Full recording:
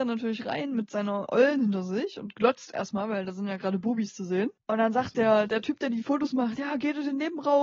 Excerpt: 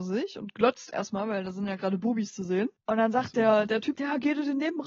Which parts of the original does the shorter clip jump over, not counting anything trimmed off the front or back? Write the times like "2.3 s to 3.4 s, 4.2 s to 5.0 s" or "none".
5.8 s to 6.6 s